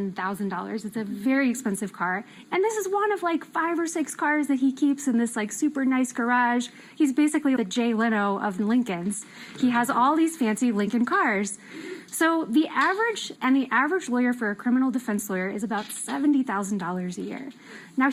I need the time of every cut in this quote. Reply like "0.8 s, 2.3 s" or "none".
7.6 s, 13.4 s